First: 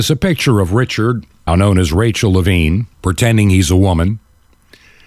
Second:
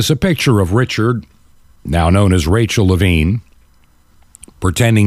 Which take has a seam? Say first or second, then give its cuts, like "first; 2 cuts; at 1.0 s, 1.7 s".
first; 2 cuts; at 1.5 s, 2.9 s